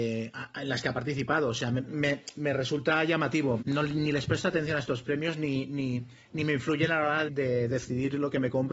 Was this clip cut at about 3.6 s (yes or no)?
yes